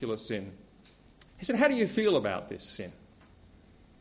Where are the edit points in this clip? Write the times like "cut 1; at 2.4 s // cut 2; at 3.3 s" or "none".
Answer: cut 1; at 1.3 s

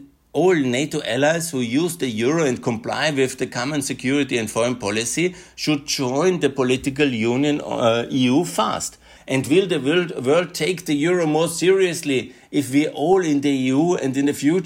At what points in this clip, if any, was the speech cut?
cut 1; at 9.2 s

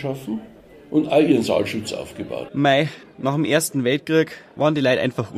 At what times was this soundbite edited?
cut 1; at 2.5 s

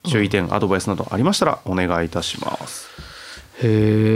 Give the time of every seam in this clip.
none

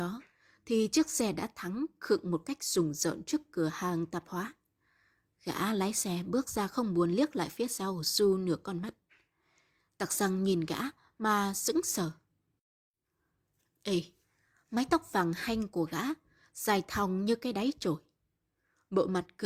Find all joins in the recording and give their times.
none

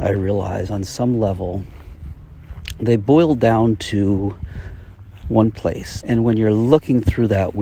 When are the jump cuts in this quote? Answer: cut 1; at 6.0 s

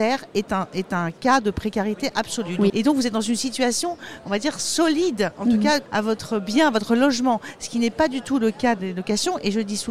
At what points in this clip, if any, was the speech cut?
cut 1; at 2.7 s // cut 2; at 5.9 s

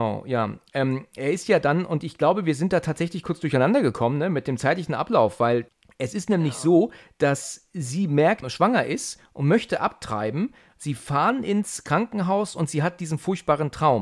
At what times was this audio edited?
cut 1; at 8.4 s

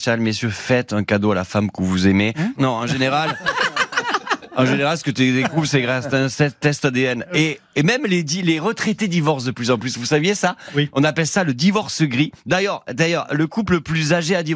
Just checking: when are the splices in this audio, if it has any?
cut 1; at 2.6 s

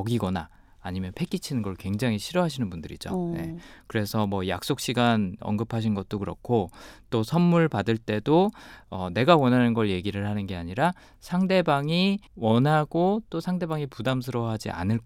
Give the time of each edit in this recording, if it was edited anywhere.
cut 1; at 12.3 s

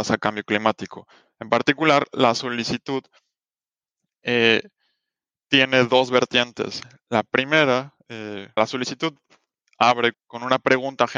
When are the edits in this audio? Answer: cut 1; at 8.6 s // cut 2; at 10.1 s

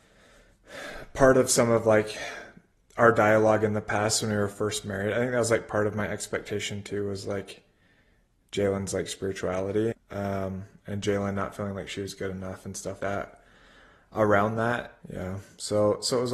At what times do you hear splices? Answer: cut 1; at 9.9 s // cut 2; at 13.0 s // cut 3; at 15.0 s

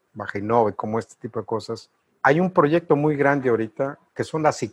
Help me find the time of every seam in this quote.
none

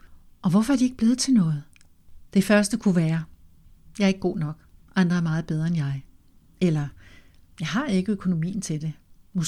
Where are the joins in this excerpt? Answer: cut 1; at 2.3 s

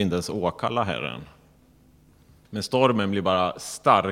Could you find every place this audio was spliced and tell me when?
cut 1; at 2.4 s

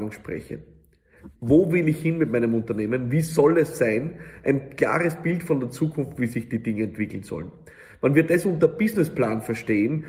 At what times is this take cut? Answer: cut 1; at 1.3 s

